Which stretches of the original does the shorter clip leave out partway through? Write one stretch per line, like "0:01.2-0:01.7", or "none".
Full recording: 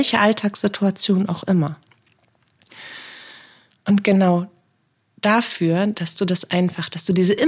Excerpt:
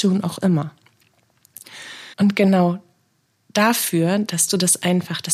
0:03.2-0:03.8